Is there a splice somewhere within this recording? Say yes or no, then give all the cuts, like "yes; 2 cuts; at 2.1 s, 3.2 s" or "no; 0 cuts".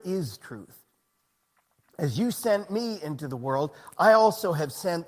no; 0 cuts